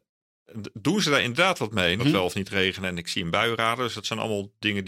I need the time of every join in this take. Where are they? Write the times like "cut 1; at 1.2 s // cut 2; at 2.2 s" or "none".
cut 1; at 2.0 s

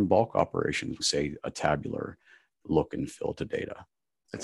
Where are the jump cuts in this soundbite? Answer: cut 1; at 1.0 s

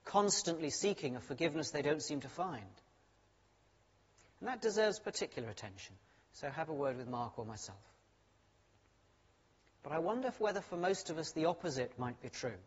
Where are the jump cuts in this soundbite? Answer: none

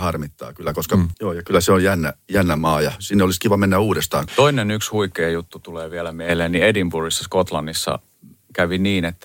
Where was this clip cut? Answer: cut 1; at 1.1 s // cut 2; at 4.3 s

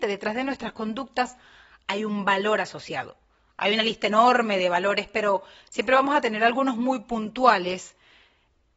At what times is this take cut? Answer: none

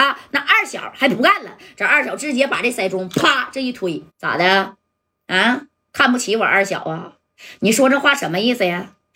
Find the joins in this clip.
cut 1; at 4.1 s

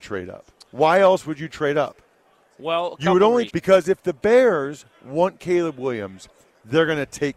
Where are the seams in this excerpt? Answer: cut 1; at 3.5 s

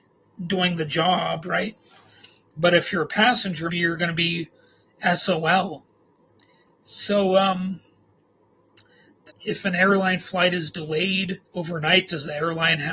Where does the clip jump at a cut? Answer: cut 1; at 3.7 s // cut 2; at 9.3 s // cut 3; at 11.5 s

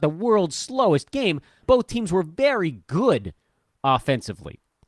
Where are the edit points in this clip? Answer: cut 1; at 1.6 s

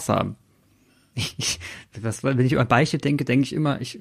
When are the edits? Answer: cut 1; at 1.1 s

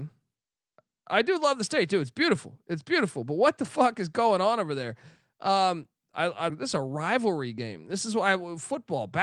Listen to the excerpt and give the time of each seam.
cut 1; at 6.5 s

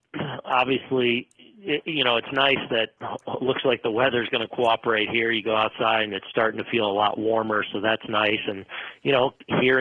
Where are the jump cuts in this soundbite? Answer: none

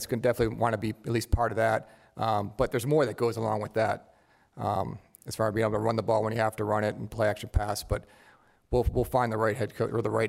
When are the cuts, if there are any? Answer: none

